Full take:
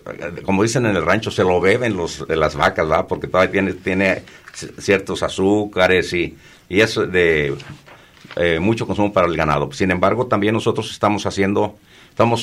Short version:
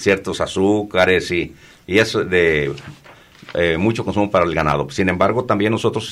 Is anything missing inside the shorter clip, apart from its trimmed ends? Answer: no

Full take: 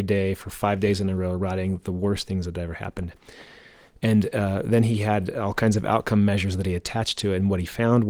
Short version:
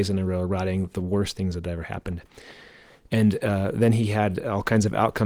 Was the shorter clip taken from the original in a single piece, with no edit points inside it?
yes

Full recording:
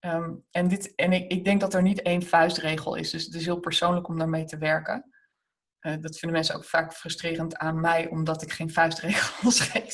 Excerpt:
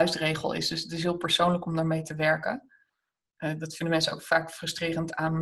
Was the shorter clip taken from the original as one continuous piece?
yes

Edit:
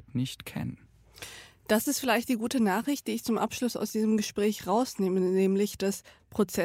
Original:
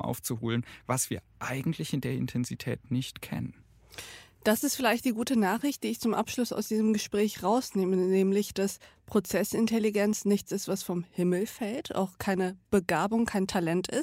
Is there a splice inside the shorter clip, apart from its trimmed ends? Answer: no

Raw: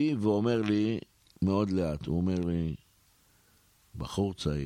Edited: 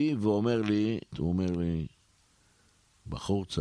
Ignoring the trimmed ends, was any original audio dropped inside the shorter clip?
yes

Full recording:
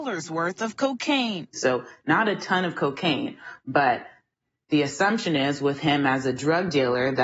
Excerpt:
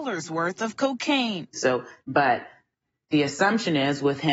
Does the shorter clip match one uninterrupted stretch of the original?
no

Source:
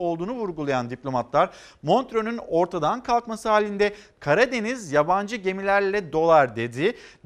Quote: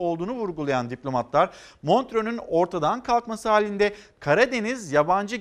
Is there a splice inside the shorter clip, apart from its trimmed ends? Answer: no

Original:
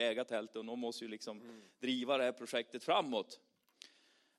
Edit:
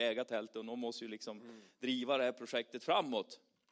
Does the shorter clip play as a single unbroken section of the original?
yes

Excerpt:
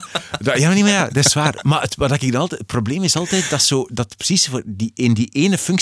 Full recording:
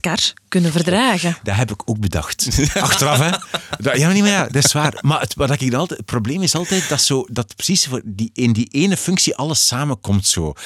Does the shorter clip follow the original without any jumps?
yes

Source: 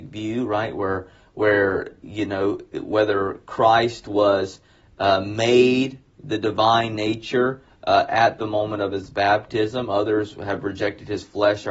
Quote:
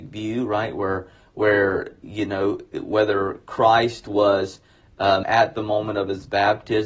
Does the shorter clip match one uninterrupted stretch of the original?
no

